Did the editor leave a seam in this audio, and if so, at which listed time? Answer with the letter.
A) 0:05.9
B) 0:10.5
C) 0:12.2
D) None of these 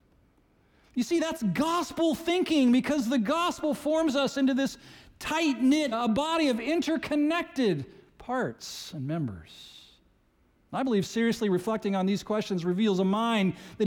A